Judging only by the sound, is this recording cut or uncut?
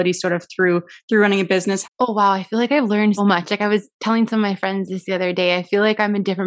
cut